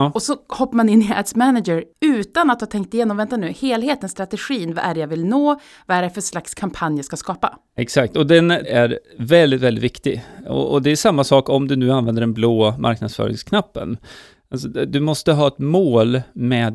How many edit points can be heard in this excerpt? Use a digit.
1